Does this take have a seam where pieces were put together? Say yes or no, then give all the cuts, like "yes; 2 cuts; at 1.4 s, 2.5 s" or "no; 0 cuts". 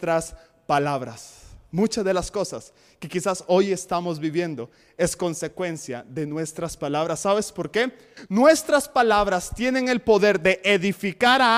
yes; 1 cut; at 8.2 s